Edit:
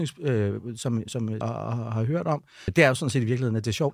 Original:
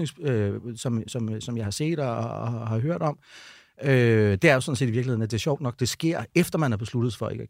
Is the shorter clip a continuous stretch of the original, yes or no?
no